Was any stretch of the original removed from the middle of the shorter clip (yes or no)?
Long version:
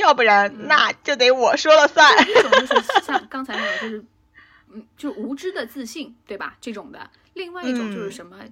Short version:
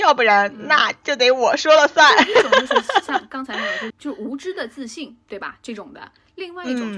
yes